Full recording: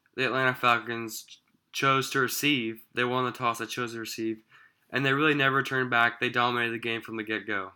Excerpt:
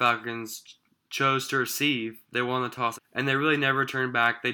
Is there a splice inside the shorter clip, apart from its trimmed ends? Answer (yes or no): yes